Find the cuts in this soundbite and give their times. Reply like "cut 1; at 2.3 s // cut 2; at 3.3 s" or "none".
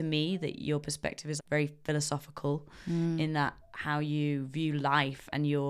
cut 1; at 1.4 s